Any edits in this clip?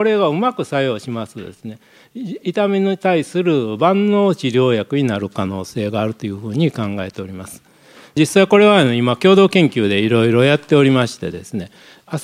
no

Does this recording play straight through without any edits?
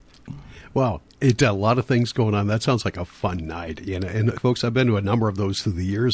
no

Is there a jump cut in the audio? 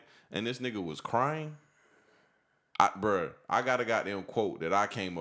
yes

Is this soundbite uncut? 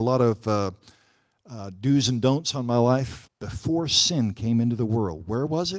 no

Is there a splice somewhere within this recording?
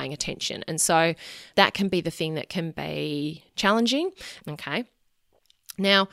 yes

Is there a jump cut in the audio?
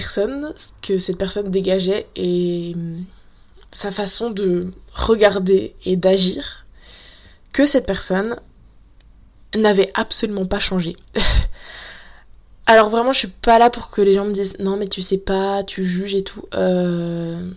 no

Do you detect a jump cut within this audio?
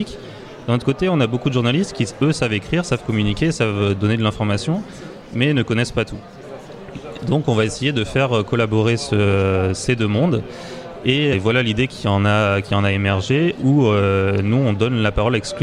yes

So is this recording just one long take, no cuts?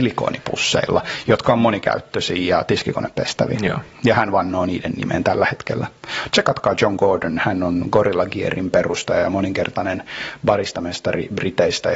yes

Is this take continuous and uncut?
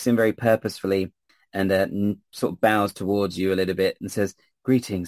yes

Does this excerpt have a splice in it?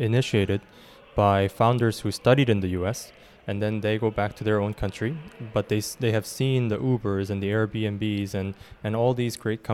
no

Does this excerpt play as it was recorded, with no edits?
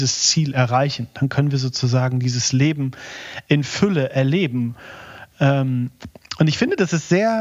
yes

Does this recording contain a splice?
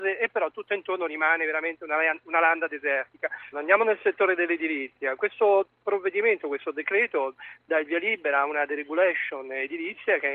yes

